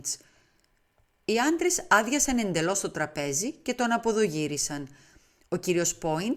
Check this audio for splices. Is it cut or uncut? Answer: uncut